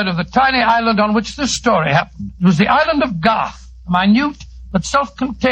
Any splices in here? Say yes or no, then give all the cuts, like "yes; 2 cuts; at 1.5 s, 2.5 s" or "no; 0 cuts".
yes; 1 cut; at 2.4 s